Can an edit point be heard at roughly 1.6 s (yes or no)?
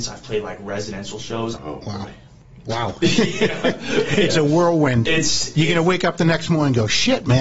yes